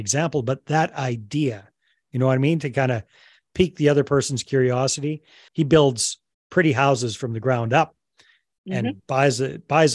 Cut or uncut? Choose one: cut